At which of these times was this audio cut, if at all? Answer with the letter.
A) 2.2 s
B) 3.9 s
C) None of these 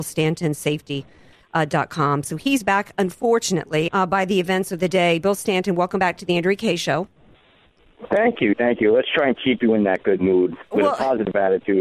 B